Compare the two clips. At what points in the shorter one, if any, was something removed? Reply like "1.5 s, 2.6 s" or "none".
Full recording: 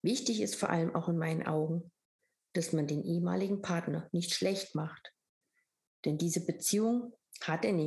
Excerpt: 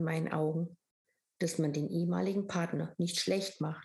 none